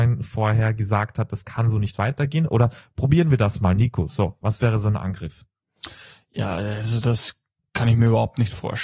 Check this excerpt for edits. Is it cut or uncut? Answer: uncut